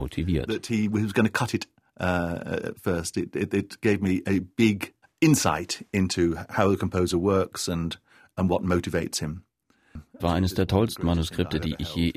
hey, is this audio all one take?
no; 2 cuts; at 5.0 s, 10.2 s

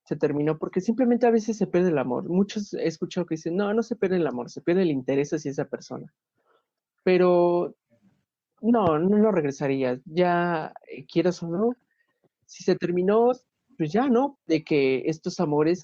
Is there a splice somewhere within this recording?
yes; 1 cut; at 14.4 s

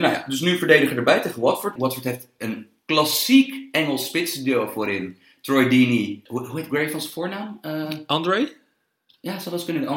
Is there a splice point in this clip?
yes; 2 cuts; at 1.8 s, 6.3 s

